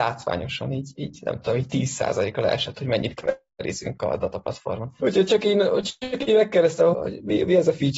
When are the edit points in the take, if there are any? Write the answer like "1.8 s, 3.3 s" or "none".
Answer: 5.0 s, 6.9 s